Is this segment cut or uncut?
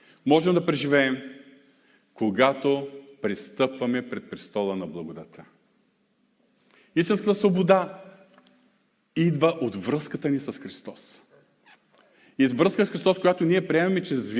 uncut